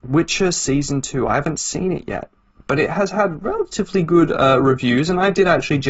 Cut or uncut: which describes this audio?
uncut